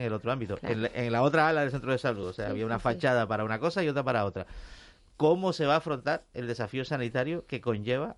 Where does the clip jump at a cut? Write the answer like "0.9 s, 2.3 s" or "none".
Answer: none